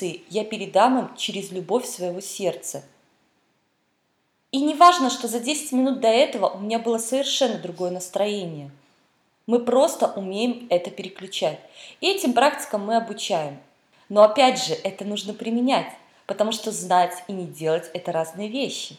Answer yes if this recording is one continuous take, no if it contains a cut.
yes